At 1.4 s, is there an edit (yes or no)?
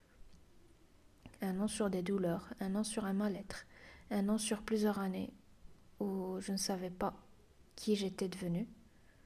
yes